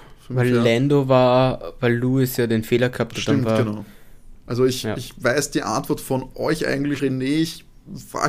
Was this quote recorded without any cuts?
no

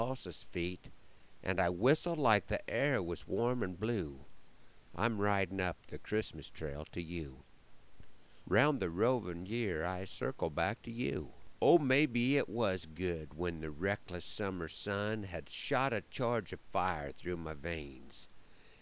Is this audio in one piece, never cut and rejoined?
no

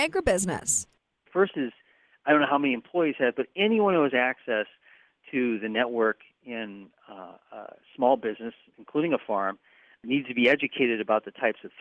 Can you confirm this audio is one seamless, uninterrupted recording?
yes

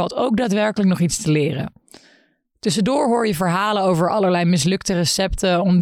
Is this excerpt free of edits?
yes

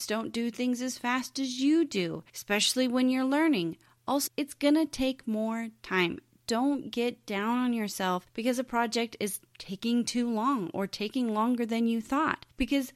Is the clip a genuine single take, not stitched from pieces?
no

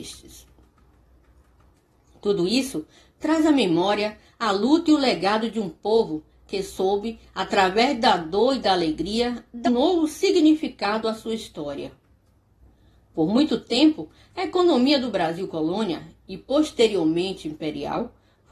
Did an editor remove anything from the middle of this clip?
yes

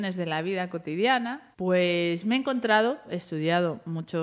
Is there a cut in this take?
yes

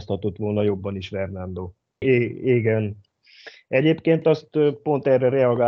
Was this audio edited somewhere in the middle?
yes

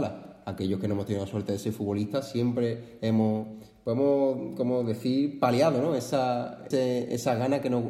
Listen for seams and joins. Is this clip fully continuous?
no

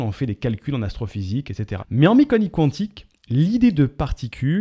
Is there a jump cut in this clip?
yes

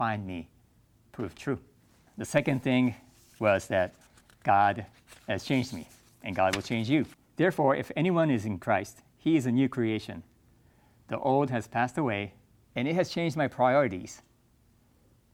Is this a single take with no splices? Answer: no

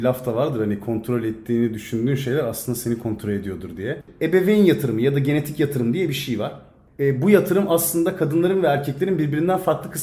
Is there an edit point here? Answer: yes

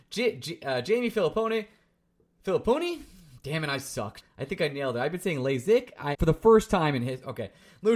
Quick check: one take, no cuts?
no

